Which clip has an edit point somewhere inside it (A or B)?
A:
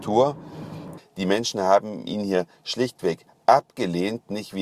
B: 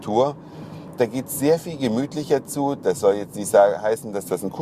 A